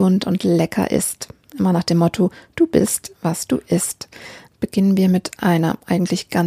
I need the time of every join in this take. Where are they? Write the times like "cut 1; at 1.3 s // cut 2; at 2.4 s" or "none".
cut 1; at 4.5 s